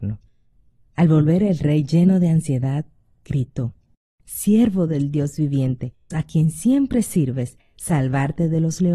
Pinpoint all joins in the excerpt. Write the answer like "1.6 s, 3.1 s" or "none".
4.2 s, 6.1 s